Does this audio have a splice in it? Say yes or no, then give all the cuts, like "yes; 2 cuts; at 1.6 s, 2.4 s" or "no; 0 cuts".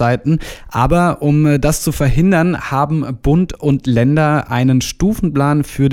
no; 0 cuts